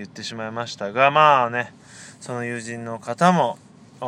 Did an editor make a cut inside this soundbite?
no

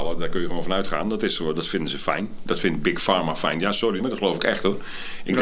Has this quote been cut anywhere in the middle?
yes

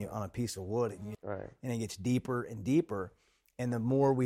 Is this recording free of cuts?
no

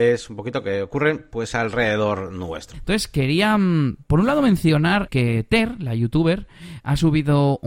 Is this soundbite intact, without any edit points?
no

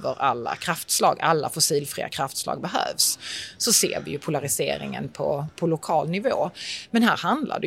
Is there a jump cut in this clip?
no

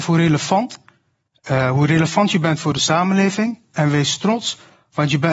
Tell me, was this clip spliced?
no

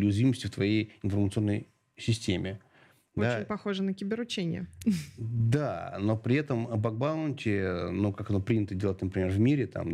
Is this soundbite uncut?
yes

